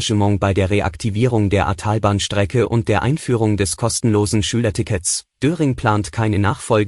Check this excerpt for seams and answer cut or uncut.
cut